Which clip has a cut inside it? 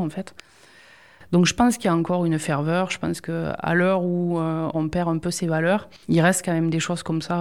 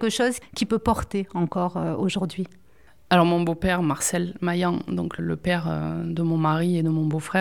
first; 2 cuts; at 4.7 s, 6.0 s

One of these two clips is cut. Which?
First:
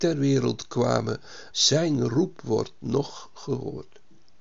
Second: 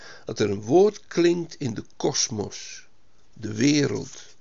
first; 1 cut; at 1.5 s

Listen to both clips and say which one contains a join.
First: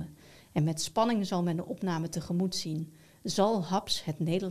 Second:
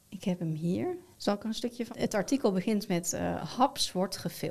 second; 1 cut; at 1.9 s

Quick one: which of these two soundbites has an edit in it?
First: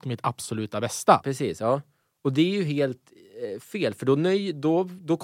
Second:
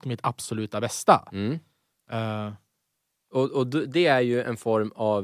first; 1 cut; at 1.2 s

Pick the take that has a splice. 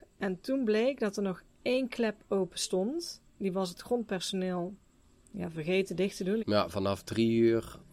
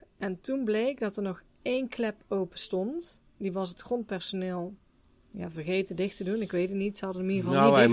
first; 1 cut; at 6.4 s

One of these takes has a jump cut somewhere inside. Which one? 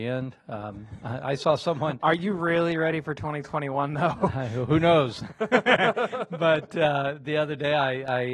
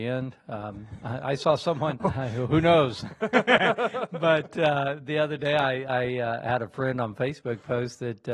second; 1 cut; at 2.0 s

